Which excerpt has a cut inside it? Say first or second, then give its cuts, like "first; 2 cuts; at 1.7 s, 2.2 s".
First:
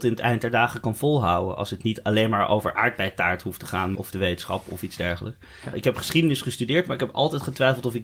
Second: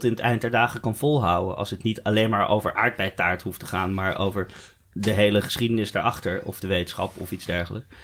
first; 2 cuts; at 4.0 s, 5.7 s